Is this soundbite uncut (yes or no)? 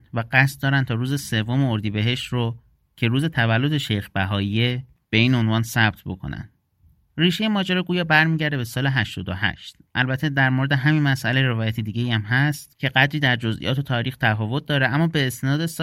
yes